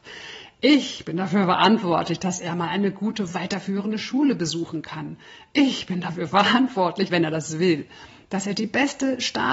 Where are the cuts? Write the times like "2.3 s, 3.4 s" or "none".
7.1 s